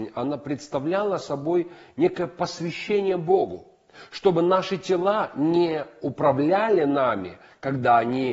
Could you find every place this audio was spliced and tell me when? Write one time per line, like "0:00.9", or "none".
none